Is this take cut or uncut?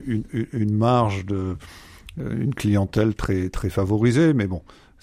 uncut